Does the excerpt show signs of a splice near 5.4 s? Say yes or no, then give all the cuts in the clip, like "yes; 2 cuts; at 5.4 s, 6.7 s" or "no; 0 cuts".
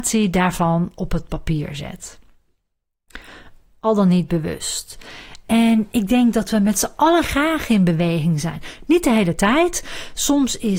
yes; 1 cut; at 5.4 s